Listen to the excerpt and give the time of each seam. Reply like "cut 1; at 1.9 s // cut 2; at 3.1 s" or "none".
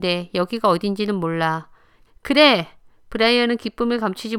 cut 1; at 2.1 s